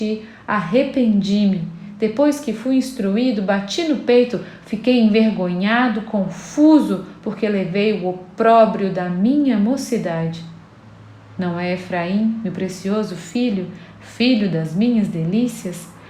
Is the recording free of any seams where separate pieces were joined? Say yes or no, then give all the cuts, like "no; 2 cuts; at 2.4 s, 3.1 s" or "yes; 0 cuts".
yes; 0 cuts